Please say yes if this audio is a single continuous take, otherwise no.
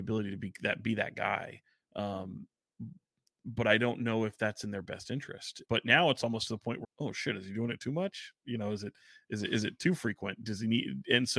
no